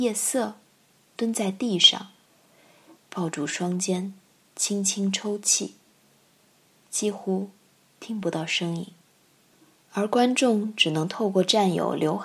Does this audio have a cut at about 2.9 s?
yes; 1 cut; at 2.9 s

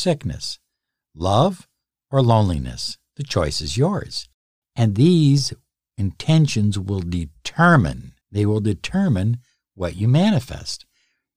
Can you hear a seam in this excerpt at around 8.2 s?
yes; 2 cuts; at 4.6 s, 8.2 s

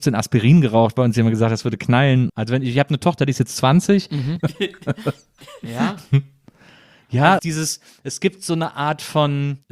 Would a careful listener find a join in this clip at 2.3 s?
yes; 3 cuts; at 2.3 s, 4.4 s, 7.4 s

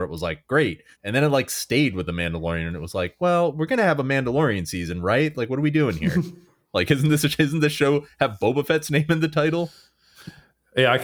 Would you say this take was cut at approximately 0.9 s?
yes; 1 cut; at 0.9 s

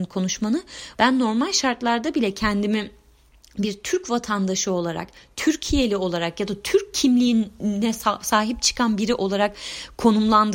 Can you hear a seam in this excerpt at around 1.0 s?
yes; 1 cut; at 1.0 s

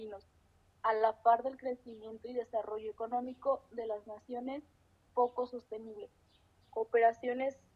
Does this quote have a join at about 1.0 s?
no; 1 cut; at 6.6 s

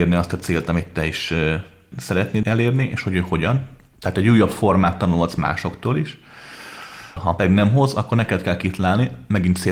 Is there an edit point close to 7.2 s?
yes; 1 cut; at 7.2 s

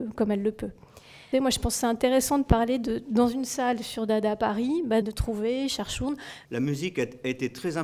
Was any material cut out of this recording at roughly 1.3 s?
yes; 3 cuts; at 1.3 s, 5.0 s, 6.4 s

